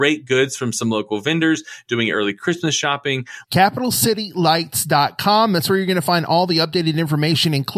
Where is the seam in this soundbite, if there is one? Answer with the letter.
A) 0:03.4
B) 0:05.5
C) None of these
A